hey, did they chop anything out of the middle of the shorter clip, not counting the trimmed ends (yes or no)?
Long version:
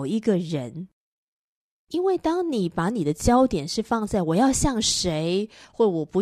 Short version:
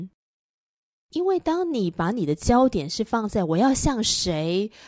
no